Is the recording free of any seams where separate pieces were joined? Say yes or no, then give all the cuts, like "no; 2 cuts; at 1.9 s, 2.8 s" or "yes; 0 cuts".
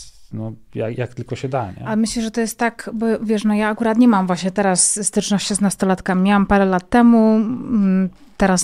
yes; 0 cuts